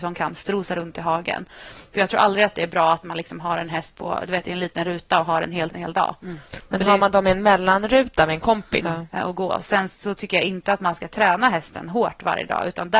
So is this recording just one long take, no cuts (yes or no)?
no